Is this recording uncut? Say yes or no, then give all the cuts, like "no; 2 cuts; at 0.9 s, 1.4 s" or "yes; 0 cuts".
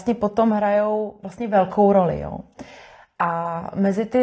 yes; 0 cuts